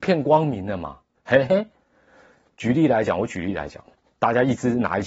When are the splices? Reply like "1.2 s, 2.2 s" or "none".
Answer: 1.2 s